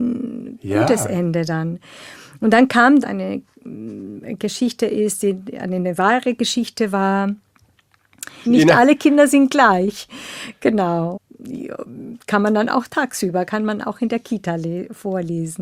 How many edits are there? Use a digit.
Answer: 2